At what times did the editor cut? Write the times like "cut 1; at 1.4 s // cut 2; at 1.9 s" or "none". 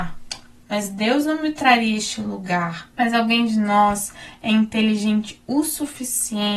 cut 1; at 2.9 s